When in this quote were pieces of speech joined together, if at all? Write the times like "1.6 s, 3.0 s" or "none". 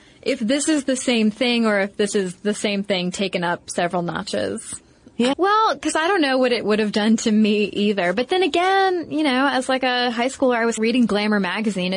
5.3 s, 10.8 s

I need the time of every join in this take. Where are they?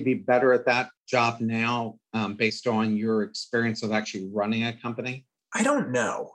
1.0 s

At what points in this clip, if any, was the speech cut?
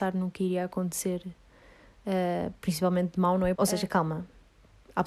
3.6 s

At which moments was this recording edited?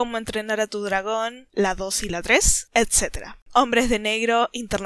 3.4 s

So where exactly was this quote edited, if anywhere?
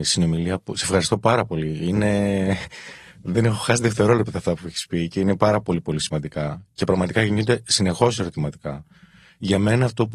none

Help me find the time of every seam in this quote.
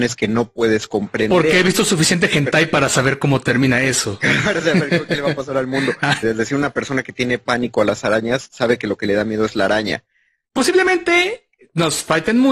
6.2 s, 10.4 s

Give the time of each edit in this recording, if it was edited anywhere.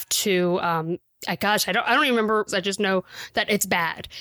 2.5 s

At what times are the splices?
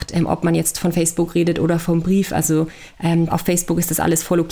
3.3 s

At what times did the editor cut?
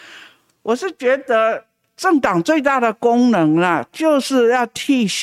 none

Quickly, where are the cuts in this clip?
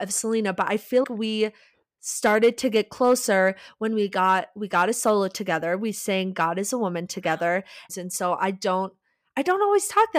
1.0 s, 7.9 s

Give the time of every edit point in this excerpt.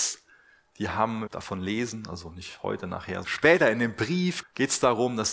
1.3 s, 3.2 s, 4.4 s

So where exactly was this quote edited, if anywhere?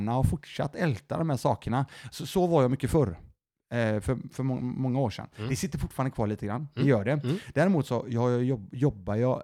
none

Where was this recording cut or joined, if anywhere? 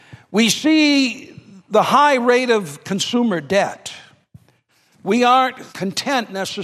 5.7 s

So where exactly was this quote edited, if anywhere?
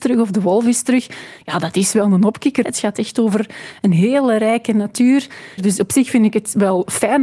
2.6 s, 5.6 s

